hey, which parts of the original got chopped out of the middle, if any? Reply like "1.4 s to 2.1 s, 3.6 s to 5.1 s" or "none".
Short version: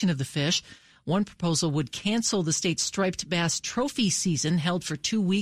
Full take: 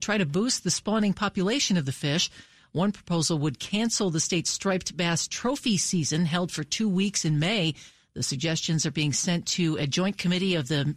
none

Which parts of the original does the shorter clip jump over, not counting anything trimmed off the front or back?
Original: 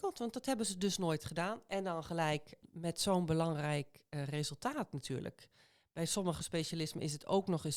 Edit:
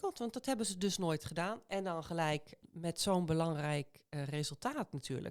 none

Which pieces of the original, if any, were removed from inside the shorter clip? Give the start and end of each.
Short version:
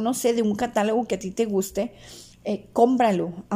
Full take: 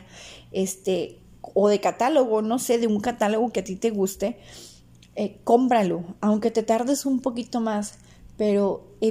4.8 s to 5.0 s

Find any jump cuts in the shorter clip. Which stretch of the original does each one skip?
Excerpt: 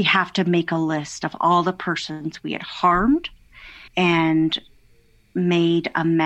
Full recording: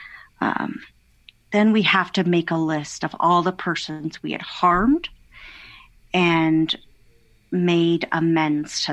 5.7 s to 6.0 s

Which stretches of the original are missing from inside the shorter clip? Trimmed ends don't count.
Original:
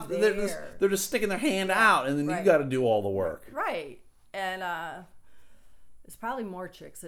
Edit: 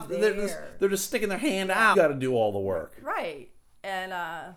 1.9 s to 2.4 s

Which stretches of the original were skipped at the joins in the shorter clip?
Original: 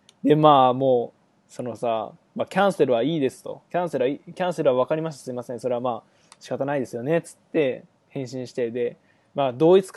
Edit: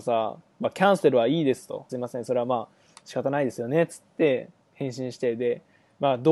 3.6 s to 5.2 s

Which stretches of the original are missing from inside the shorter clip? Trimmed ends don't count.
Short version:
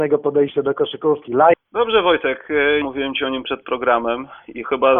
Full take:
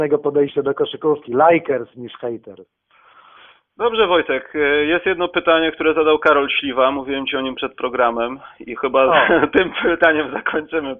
1.5 s to 3.6 s, 4.9 s to 6.9 s

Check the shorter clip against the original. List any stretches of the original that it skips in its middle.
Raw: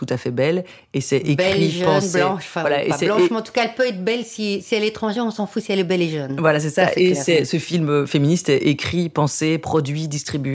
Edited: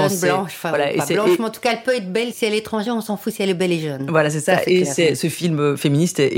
4.2 s to 4.6 s

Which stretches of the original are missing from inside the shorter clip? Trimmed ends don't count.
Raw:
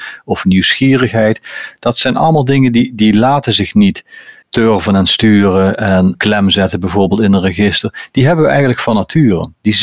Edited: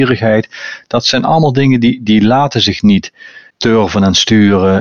none

